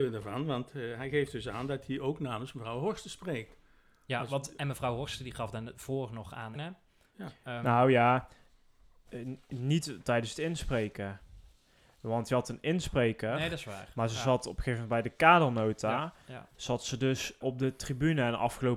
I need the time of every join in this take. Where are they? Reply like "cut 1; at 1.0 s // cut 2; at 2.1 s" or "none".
cut 1; at 6.6 s // cut 2; at 17.4 s